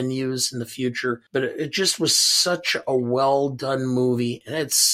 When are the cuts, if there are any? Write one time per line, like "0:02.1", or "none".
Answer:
0:01.3

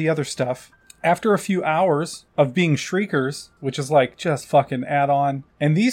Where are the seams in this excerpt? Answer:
0:03.6

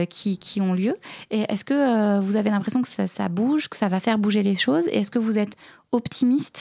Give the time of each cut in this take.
none

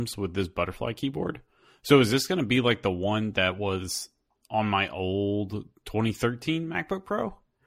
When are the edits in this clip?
none

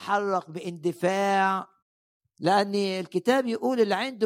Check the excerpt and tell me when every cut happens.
none

